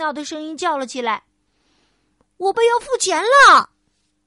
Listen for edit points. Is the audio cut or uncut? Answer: cut